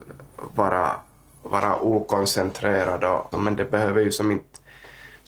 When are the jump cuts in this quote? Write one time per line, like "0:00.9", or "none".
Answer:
0:03.3